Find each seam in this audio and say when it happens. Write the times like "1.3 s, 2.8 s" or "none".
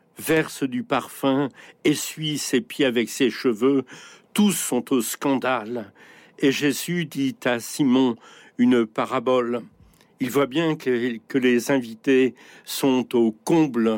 none